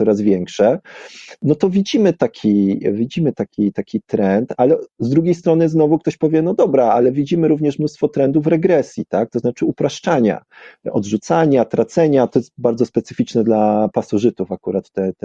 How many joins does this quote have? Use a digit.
0